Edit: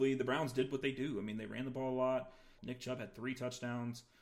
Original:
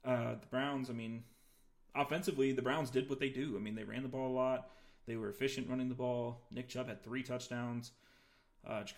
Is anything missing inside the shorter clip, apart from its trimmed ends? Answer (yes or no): yes